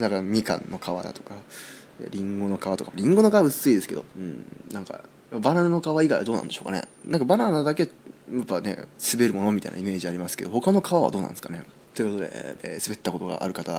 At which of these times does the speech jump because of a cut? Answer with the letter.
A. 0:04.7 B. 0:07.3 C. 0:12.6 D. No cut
C